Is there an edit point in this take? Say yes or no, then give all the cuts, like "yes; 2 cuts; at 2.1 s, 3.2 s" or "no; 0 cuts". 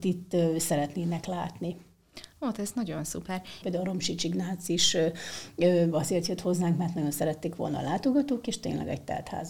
yes; 1 cut; at 3.6 s